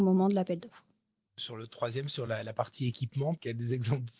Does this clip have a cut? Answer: no; 0 cuts

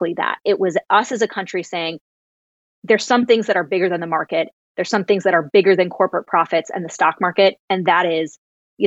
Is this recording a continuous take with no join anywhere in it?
yes; 0 cuts

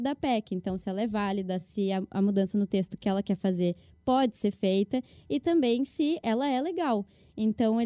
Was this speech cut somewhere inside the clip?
no; 0 cuts

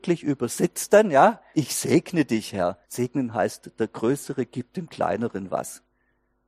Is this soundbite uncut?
no; 2 cuts; at 1.5 s, 2.8 s

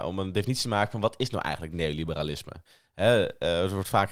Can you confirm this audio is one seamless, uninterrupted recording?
yes; 0 cuts

